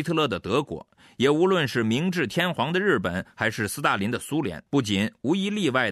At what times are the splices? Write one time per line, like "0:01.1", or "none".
0:04.7